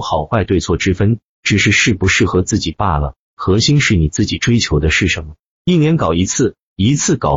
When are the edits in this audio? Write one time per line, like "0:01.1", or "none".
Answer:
none